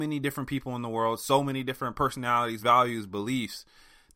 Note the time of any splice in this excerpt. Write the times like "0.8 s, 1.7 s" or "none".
2.6 s